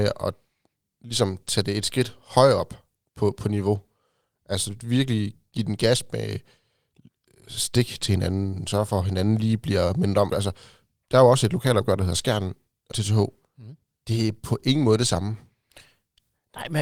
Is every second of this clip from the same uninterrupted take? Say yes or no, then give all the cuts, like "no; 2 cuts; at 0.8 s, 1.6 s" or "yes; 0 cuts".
no; 2 cuts; at 10.3 s, 12.9 s